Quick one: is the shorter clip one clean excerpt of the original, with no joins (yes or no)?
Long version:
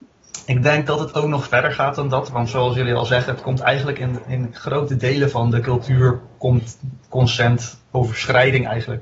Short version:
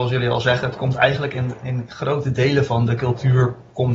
yes